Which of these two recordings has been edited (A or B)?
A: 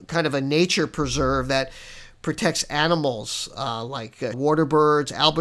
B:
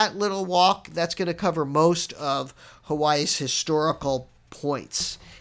A